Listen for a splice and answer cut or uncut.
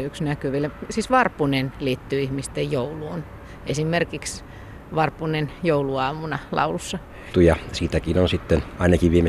cut